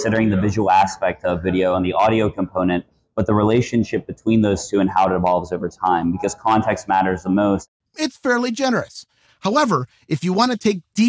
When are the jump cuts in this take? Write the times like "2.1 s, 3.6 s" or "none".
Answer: 7.8 s